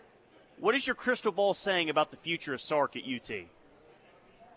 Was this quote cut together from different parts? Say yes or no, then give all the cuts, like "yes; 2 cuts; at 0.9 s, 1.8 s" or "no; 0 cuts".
no; 0 cuts